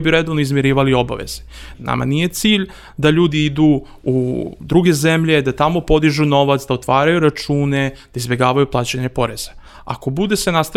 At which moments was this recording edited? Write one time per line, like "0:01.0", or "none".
0:01.7

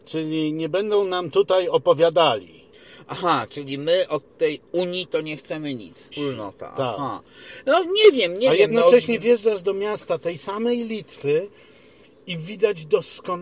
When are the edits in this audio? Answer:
0:06.1

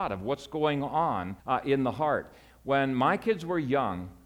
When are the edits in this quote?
0:01.4

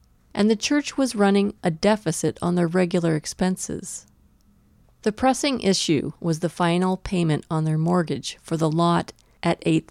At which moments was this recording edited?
0:04.8

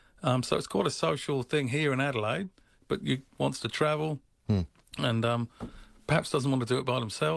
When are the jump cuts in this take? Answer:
0:03.4

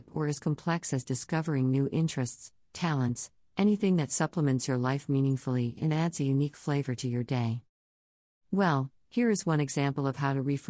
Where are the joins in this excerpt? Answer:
0:02.6
0:08.3

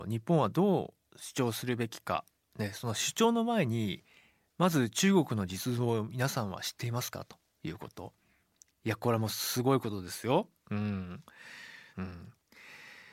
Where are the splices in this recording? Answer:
0:08.7
0:11.9

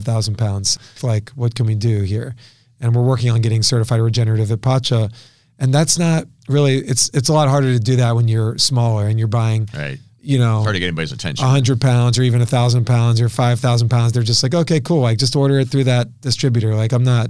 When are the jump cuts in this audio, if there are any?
0:01.0

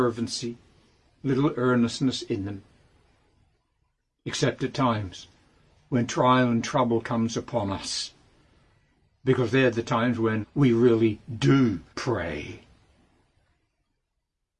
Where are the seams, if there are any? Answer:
0:10.4
0:11.9

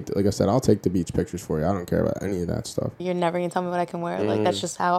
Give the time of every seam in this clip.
0:03.0

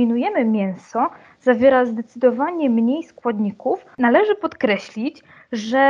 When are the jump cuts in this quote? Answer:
0:03.9

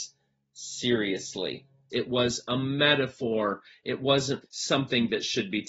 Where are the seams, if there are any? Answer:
0:01.9
0:04.4

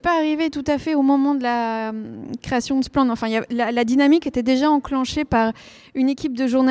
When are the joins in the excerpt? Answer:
none

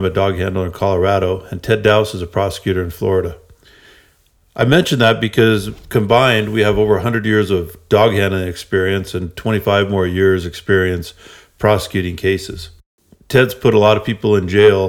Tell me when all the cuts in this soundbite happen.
none

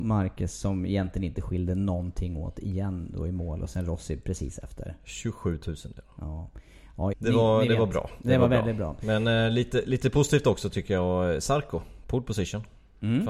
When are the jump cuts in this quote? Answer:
0:07.1

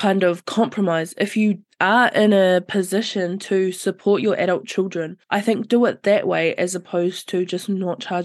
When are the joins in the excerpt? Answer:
0:05.2

